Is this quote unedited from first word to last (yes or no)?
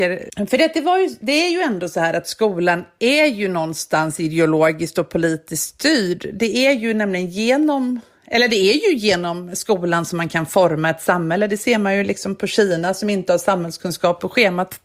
yes